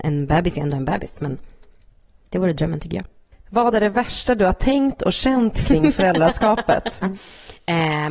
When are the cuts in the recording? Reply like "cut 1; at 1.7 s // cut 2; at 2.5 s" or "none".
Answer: cut 1; at 7.0 s